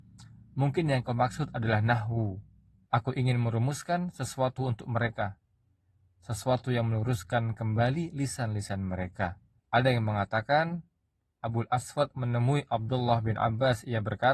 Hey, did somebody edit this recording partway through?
yes; 2 cuts; at 2.8 s, 9.6 s

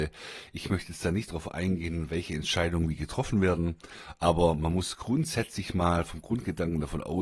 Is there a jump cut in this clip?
no; 0 cuts

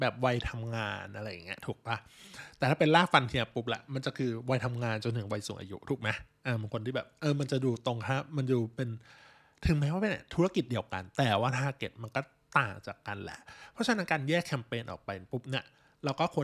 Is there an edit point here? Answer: no; 0 cuts

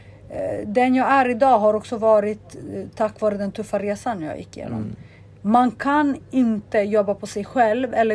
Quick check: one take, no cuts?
yes; 0 cuts

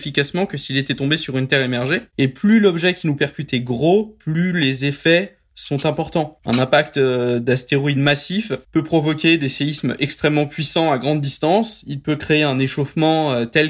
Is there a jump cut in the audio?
yes; 1 cut; at 8.6 s

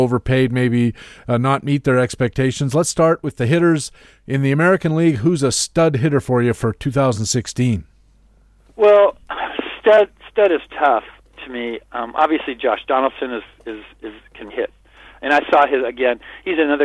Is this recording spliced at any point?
yes; 1 cut; at 14.5 s

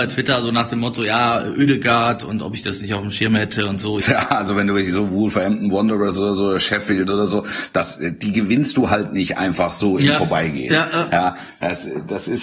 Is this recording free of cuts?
no; 1 cut; at 4.0 s

